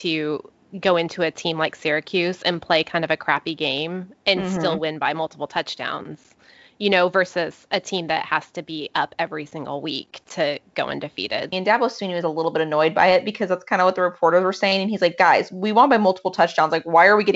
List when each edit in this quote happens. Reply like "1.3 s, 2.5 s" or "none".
11.5 s